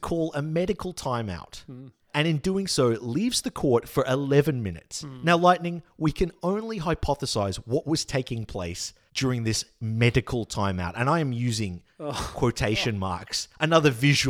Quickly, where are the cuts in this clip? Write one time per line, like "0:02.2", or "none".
none